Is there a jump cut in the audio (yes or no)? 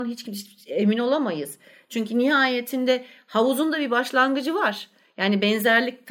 no